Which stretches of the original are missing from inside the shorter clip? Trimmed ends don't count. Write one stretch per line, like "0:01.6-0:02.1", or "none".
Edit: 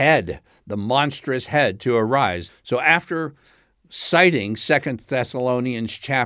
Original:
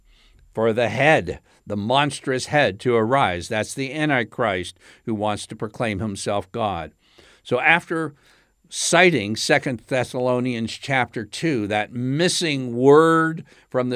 0:03.5-0:07.3